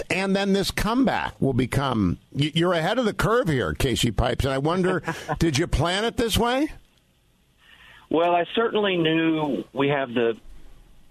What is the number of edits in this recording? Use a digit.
0